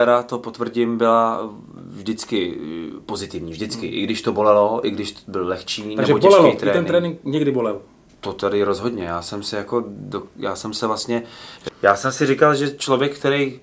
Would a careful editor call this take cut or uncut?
cut